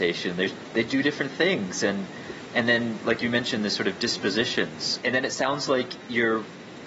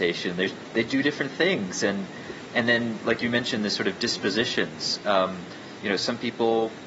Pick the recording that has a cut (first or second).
first